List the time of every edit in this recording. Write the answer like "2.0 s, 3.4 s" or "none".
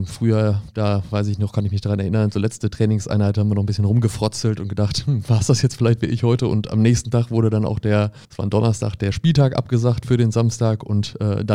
8.2 s